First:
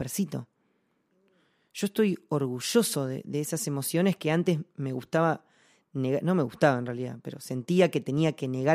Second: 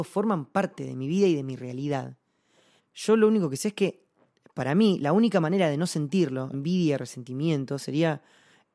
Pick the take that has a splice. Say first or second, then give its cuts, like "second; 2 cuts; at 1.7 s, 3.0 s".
second; 2 cuts; at 2.8 s, 6.5 s